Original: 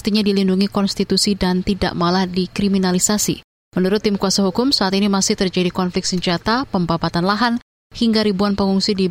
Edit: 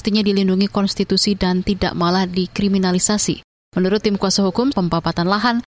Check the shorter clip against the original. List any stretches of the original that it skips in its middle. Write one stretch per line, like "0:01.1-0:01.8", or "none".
0:04.7-0:06.7